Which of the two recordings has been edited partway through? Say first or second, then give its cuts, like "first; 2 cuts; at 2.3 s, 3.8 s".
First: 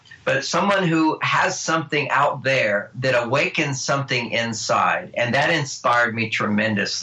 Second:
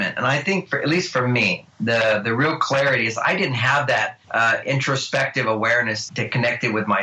second; 2 cuts; at 4.2 s, 6.1 s